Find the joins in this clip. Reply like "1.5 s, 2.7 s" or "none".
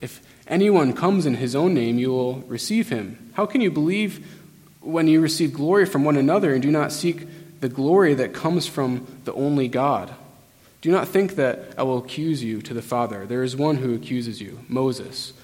none